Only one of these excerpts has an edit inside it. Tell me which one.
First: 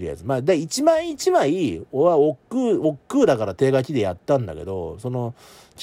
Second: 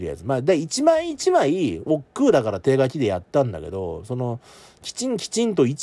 second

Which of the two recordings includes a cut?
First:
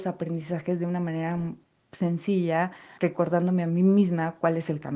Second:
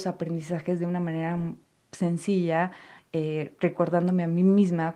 first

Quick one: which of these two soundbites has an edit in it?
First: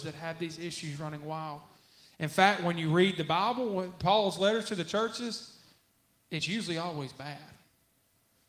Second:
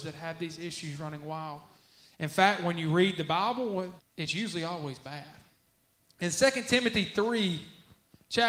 second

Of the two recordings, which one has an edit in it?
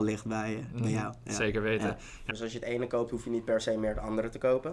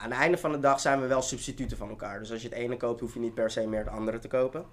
first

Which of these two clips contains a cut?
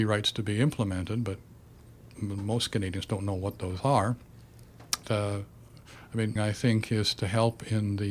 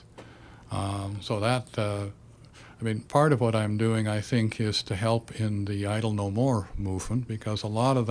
first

